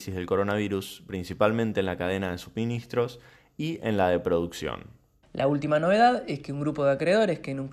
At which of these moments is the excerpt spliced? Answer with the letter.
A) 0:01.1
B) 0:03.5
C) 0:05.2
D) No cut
C